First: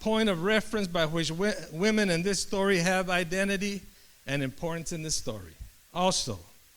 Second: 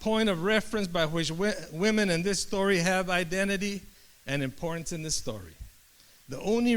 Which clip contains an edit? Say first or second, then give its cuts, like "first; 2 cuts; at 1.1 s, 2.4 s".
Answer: first; 1 cut; at 5.9 s